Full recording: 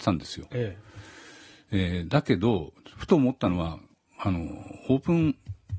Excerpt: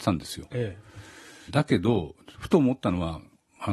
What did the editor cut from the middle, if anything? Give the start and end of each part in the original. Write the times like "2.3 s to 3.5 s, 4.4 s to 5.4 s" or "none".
1.5 s to 2.1 s